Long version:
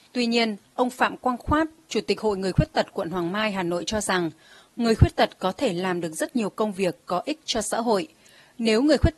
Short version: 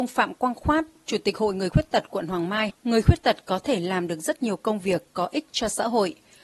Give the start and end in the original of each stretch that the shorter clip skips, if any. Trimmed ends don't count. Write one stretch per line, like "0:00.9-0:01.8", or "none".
0:03.5-0:04.6